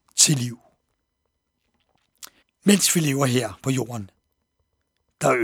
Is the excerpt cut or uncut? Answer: cut